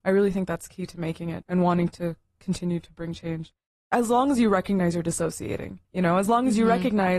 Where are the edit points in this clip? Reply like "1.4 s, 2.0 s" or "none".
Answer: 1.4 s, 5.8 s